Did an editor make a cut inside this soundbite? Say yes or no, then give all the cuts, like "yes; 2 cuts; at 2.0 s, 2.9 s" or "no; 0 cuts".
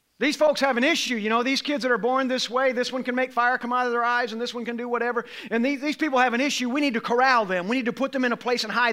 no; 0 cuts